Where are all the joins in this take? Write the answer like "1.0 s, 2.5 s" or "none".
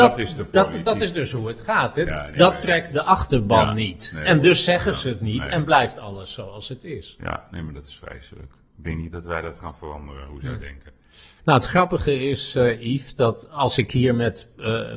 11.4 s